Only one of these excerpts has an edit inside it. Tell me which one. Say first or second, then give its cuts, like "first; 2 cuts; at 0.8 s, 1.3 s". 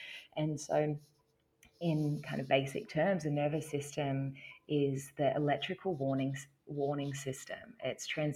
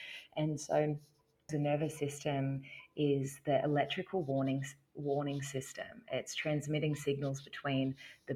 second; 1 cut; at 1.5 s